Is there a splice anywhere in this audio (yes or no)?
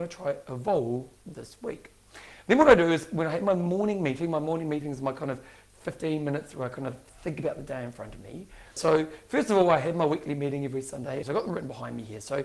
yes